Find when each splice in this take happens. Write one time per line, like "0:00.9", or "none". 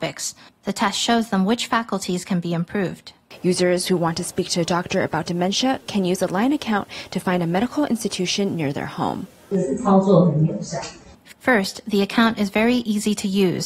none